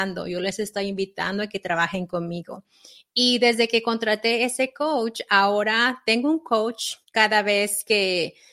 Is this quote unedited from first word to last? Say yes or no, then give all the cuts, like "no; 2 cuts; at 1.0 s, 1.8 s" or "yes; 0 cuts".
no; 1 cut; at 7.0 s